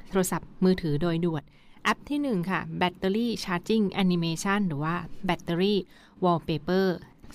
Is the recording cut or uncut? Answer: uncut